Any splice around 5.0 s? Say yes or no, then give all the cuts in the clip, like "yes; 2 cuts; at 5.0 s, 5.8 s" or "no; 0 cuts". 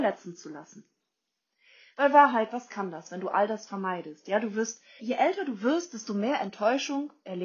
yes; 1 cut; at 5.0 s